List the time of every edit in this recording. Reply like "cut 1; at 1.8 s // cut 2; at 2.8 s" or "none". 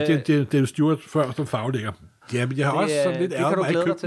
cut 1; at 2.2 s